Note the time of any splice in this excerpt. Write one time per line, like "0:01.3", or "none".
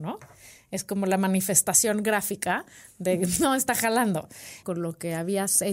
0:04.6